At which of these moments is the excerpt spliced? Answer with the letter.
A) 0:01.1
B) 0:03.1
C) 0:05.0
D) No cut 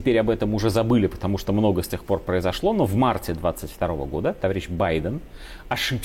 D